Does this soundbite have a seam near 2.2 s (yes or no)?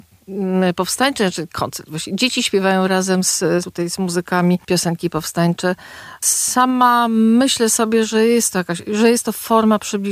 no